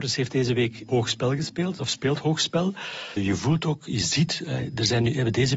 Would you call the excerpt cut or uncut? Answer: cut